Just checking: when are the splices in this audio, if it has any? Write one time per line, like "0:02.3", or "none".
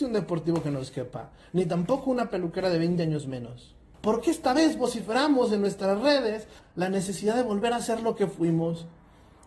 0:03.9
0:06.6

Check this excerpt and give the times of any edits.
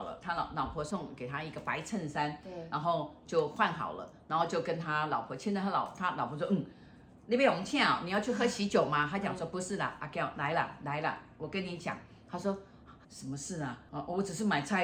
0:13.0

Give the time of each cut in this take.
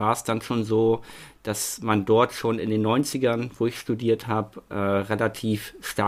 none

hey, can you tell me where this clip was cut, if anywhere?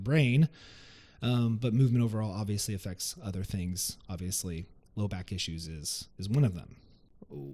none

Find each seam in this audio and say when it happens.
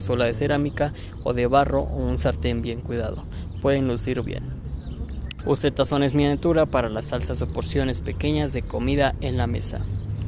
0:04.2
0:05.4

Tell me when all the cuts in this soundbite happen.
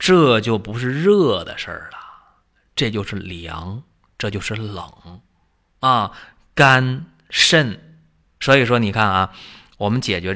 0:08.2

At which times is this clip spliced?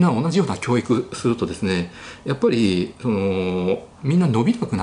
0:03.9

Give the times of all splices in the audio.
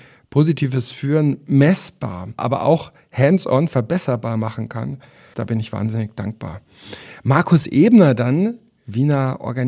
0:02.4
0:05.3

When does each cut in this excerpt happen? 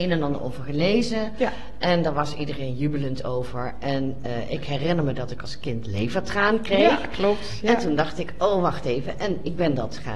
none

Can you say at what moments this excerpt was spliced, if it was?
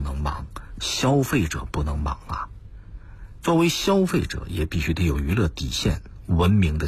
0:03.4

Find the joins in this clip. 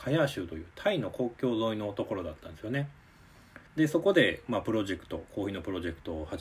0:03.7

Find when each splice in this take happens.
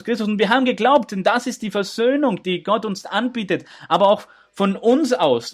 none

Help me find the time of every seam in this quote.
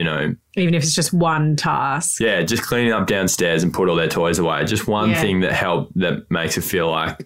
none

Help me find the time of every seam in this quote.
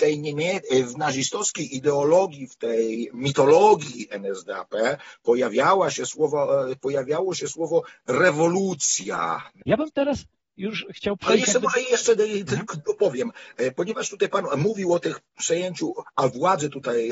0:09.6

